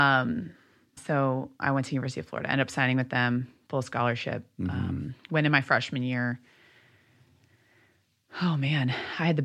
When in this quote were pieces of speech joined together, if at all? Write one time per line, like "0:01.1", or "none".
0:01.0
0:05.2